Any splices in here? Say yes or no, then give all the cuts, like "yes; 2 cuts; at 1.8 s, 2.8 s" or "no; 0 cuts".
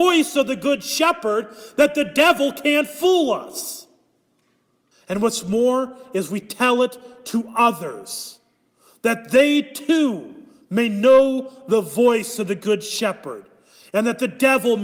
yes; 1 cut; at 4.9 s